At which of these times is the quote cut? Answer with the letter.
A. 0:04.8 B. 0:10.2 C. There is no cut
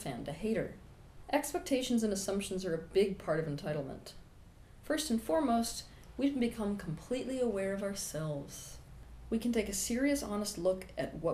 A